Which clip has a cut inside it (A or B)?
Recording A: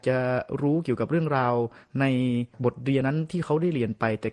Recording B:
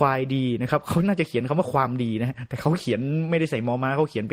A